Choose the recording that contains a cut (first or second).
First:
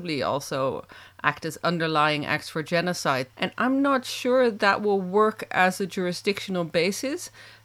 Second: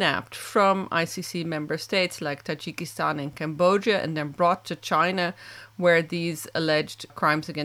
first